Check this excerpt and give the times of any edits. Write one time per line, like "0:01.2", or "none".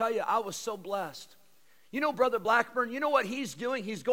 none

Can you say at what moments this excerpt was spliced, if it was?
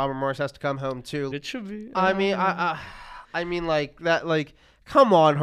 0:01.3

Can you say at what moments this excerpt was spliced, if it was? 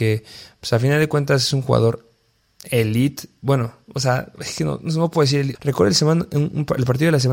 0:05.5

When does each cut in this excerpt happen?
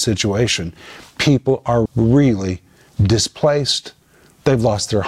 0:01.9

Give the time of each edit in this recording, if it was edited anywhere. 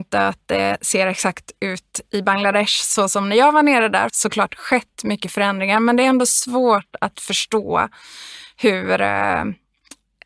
0:04.1

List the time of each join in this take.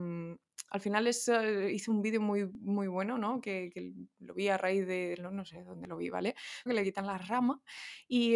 0:06.7

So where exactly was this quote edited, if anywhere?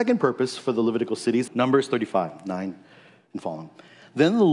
0:01.5

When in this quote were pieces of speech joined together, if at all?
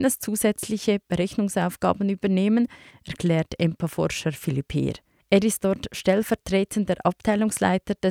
0:02.9
0:05.2

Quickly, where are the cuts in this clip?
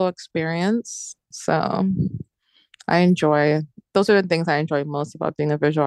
0:01.3

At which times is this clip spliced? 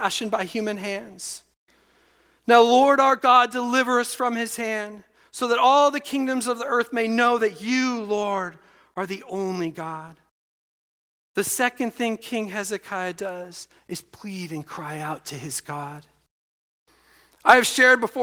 none

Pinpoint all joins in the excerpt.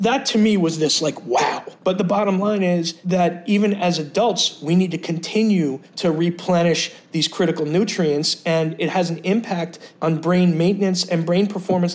0:01.8

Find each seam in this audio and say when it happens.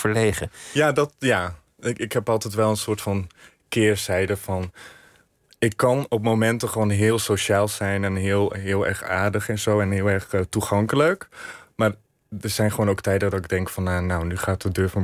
none

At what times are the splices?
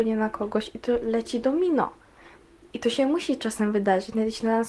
none

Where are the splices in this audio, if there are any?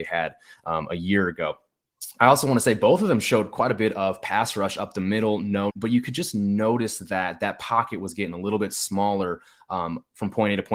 0:05.7

